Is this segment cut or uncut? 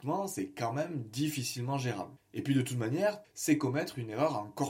cut